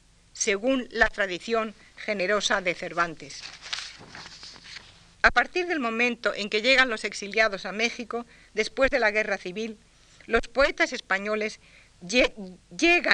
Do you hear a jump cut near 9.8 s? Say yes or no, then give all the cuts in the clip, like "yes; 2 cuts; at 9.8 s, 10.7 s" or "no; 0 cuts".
no; 1 cut; at 5.1 s